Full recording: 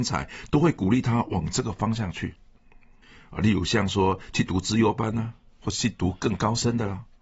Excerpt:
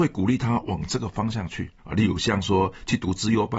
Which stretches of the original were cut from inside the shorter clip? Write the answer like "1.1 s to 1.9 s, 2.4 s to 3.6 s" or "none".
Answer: 2.4 s to 3.2 s